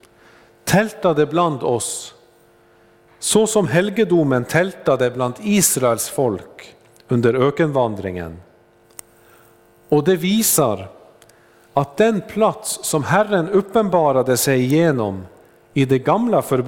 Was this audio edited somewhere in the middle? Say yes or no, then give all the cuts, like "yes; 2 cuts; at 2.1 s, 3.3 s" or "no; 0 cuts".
no; 0 cuts